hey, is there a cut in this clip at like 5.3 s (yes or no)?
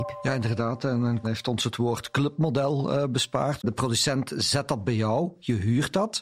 no